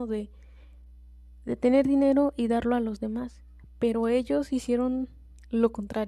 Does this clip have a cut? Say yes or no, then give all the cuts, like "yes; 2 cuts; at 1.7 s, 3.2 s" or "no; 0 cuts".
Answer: no; 0 cuts